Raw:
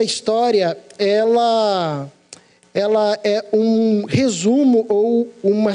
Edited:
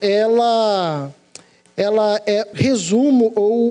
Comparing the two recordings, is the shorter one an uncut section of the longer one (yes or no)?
no